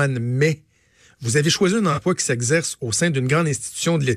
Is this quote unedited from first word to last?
yes; 0 cuts

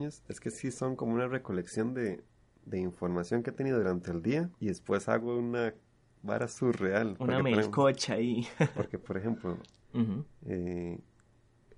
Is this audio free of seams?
no; 2 cuts; at 4.5 s, 9.8 s

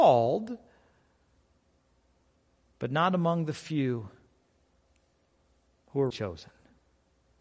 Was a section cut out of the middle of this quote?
yes; 1 cut; at 6.1 s

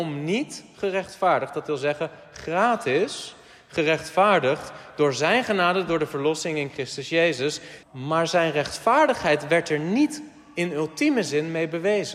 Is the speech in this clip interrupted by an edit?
yes; 1 cut; at 7.8 s

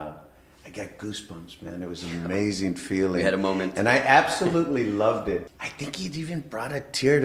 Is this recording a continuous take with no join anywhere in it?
no; 1 cut; at 5.5 s

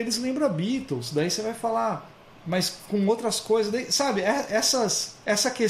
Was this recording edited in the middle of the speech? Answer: no; 0 cuts

